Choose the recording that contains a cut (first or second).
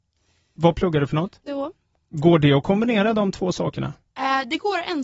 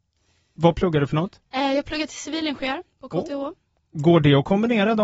first